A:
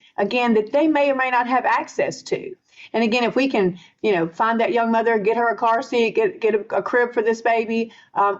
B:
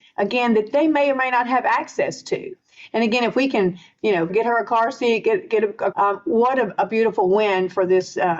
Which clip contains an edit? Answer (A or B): B